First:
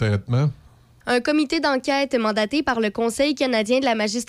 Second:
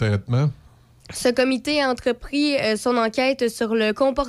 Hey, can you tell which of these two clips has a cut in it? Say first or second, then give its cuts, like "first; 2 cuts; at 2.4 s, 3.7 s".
first; 1 cut; at 1.0 s